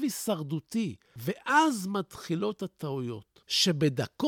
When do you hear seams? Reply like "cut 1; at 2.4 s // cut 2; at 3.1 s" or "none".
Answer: none